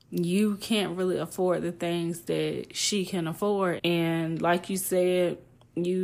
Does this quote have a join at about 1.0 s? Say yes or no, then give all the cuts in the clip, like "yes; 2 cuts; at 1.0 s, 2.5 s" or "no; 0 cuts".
no; 1 cut; at 3.8 s